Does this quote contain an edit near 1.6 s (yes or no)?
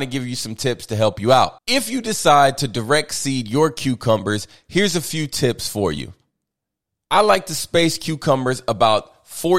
yes